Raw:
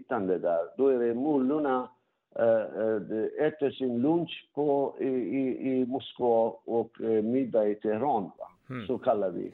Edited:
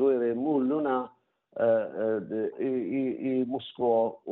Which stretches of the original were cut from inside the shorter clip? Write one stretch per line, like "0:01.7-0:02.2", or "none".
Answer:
0:03.3-0:04.9